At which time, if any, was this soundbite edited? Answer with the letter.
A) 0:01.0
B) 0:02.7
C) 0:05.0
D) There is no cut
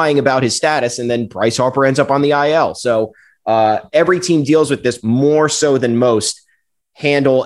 C